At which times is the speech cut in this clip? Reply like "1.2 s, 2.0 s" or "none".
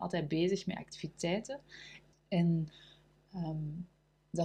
2.1 s